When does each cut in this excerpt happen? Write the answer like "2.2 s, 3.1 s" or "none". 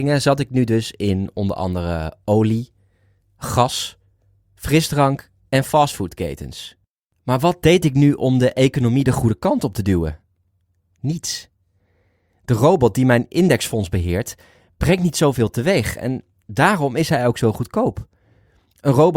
none